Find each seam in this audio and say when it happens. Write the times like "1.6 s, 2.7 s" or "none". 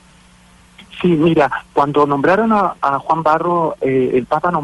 none